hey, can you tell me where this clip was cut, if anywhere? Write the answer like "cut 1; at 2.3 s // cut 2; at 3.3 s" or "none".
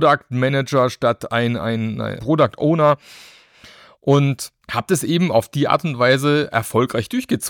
cut 1; at 2.2 s // cut 2; at 4.6 s